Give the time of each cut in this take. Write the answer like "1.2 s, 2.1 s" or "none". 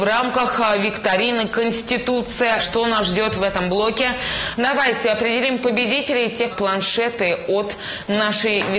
2.6 s, 4.6 s, 6.5 s